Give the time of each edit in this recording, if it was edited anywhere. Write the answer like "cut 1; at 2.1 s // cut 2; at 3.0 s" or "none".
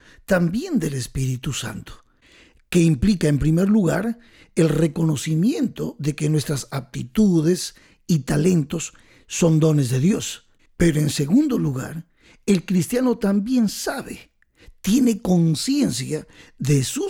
cut 1; at 10.7 s